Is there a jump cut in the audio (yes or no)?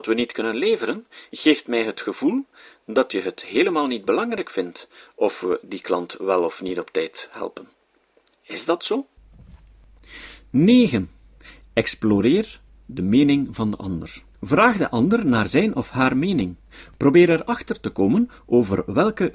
yes